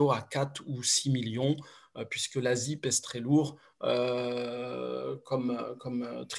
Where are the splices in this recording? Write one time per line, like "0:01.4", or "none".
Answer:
none